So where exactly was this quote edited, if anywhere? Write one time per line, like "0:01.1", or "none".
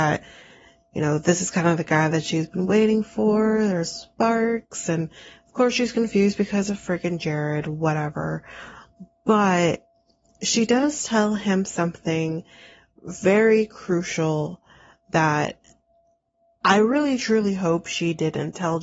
none